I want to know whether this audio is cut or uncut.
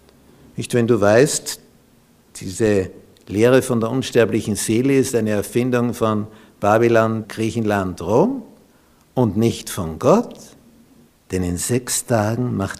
cut